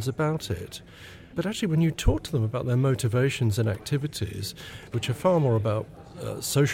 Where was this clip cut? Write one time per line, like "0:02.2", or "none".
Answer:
0:01.3
0:04.9